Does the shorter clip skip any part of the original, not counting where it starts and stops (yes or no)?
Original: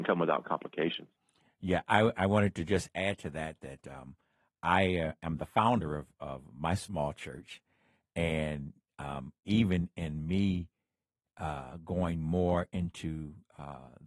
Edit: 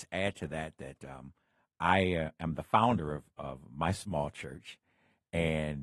no